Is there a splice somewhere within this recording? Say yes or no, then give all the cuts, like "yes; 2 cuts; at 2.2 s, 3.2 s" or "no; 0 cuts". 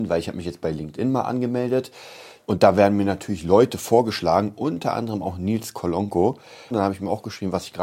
yes; 2 cuts; at 2.4 s, 6.7 s